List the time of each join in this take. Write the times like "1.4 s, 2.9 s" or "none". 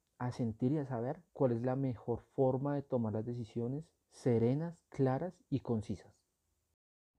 1.3 s, 4.0 s